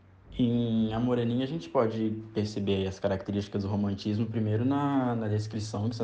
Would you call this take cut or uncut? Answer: uncut